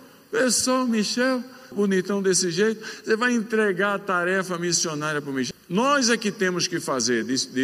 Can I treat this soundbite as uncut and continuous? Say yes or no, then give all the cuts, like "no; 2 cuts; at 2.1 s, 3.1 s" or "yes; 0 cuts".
no; 2 cuts; at 1.7 s, 5.5 s